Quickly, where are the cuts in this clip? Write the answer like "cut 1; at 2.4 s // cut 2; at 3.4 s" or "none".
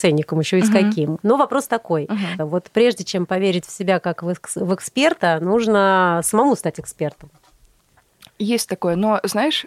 cut 1; at 1.2 s // cut 2; at 2.4 s